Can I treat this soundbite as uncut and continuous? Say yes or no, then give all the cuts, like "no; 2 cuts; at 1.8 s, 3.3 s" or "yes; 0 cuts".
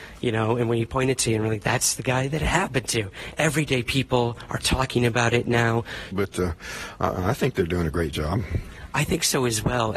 no; 2 cuts; at 3.4 s, 6.1 s